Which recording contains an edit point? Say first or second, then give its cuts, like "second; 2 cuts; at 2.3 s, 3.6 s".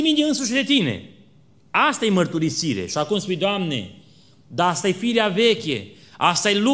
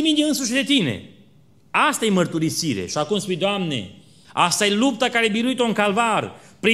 second; 1 cut; at 4.2 s